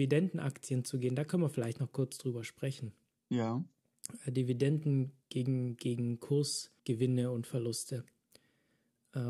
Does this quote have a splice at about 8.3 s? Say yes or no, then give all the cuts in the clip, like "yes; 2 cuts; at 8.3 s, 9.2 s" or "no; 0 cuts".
no; 1 cut; at 6.8 s